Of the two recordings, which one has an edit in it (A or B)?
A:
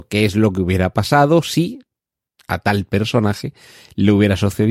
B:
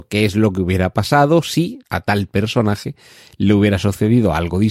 B